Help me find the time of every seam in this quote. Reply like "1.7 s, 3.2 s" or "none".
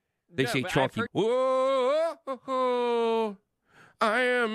1.1 s